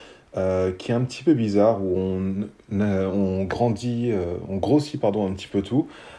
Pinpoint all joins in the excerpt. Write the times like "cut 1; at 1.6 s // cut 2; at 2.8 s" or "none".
none